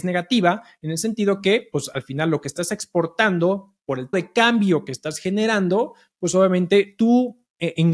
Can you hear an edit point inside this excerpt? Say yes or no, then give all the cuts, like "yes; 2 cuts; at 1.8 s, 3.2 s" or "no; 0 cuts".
yes; 1 cut; at 4.1 s